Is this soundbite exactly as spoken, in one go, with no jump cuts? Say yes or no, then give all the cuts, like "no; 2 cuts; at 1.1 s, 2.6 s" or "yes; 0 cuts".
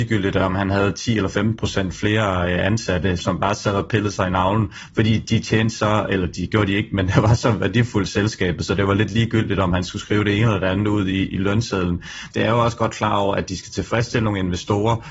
no; 2 cuts; at 3.2 s, 12.3 s